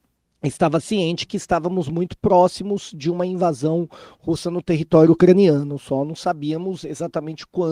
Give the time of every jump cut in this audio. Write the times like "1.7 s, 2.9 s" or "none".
none